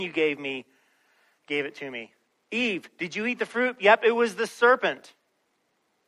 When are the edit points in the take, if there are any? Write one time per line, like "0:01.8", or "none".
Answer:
none